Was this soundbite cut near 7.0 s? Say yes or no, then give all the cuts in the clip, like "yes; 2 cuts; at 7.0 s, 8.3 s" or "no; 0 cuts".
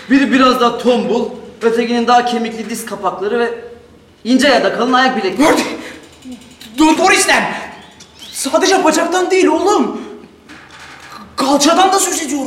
yes; 1 cut; at 7.0 s